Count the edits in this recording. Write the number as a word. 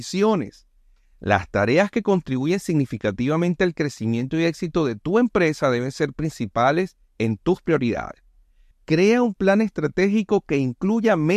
two